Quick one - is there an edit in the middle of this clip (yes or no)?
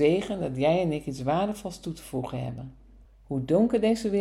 yes